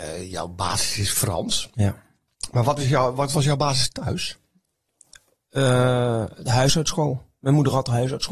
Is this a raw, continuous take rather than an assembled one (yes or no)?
yes